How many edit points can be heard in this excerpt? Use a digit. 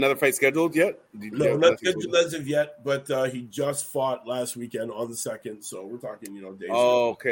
0